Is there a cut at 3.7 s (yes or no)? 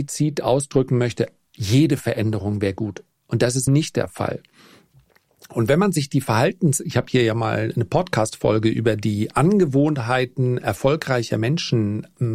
yes